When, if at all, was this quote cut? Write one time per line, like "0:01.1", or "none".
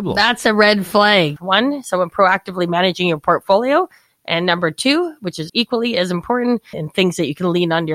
0:01.4
0:05.5
0:06.7